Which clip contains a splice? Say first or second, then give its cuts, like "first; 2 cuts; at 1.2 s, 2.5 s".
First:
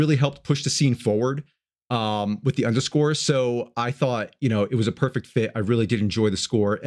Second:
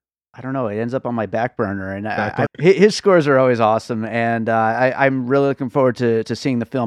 second; 1 cut; at 2.5 s